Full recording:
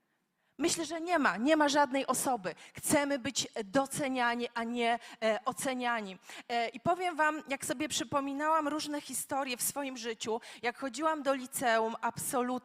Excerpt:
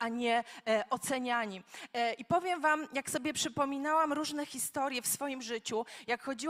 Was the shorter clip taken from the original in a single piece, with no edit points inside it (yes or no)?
yes